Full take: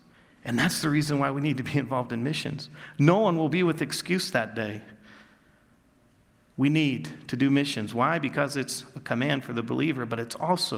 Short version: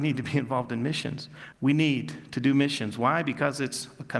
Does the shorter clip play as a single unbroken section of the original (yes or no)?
no